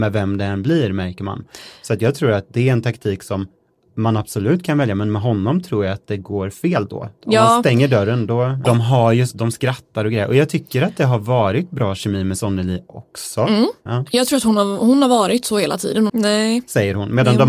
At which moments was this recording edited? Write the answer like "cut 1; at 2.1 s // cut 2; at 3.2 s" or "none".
cut 1; at 8.6 s // cut 2; at 13.9 s // cut 3; at 16.1 s